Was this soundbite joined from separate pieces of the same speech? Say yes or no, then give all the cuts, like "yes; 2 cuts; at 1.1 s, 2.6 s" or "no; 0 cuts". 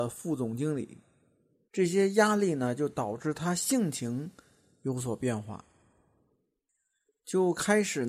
yes; 1 cut; at 1.6 s